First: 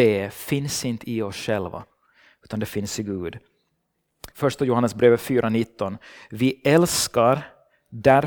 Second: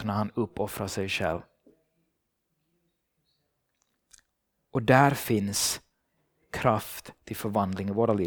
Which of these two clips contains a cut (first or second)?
first